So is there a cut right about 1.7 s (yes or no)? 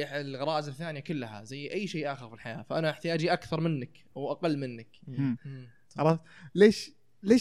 no